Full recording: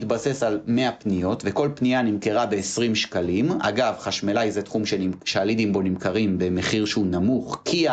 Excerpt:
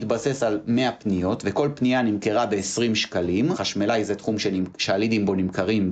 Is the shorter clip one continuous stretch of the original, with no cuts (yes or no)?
no